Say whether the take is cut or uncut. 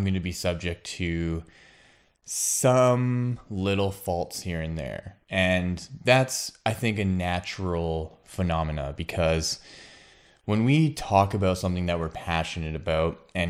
uncut